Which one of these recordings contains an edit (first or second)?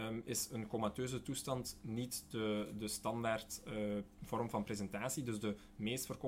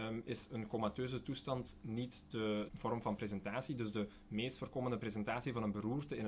second